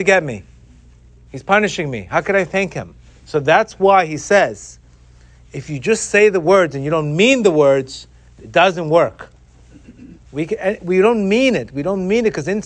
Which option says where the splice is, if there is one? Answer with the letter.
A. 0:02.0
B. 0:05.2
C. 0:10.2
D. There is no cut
C